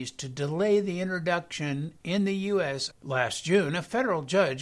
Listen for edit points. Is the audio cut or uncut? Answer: cut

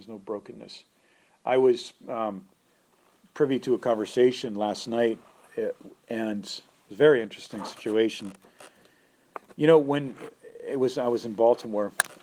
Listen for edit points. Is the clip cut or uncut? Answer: uncut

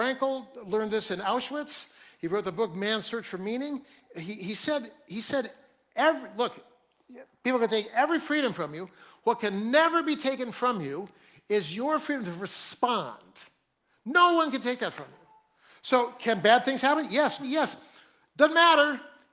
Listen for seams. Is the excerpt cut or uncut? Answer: cut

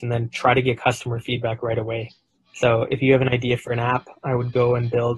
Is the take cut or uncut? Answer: uncut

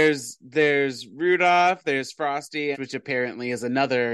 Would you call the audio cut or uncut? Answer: cut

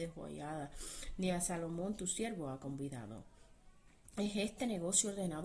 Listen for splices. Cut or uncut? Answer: uncut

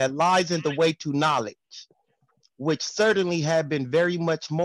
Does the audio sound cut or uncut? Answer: uncut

